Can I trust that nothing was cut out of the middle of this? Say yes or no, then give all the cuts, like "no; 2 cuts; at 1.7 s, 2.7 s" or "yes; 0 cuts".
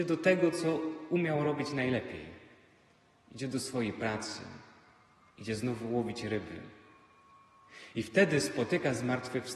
yes; 0 cuts